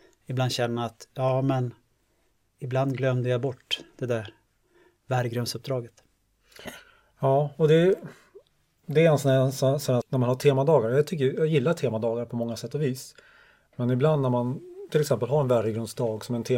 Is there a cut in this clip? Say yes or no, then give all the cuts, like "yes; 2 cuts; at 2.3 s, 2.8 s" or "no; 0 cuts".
yes; 1 cut; at 10.0 s